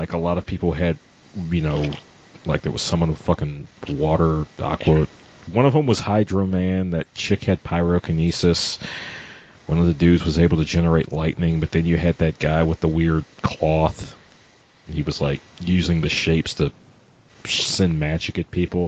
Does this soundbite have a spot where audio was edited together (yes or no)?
yes